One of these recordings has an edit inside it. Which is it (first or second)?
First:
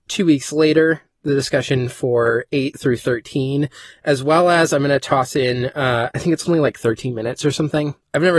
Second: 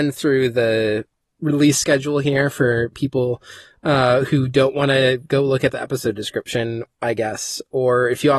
first